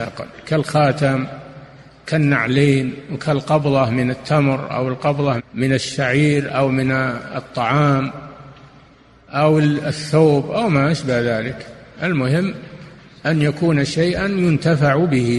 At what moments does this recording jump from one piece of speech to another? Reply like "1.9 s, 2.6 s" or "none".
5.4 s